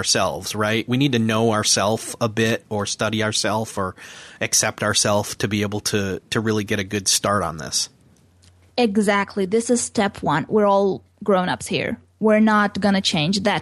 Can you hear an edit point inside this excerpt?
yes; 1 cut; at 10.5 s

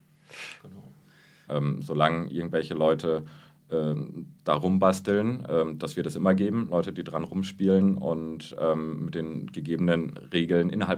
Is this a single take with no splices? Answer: no; 1 cut; at 1.5 s

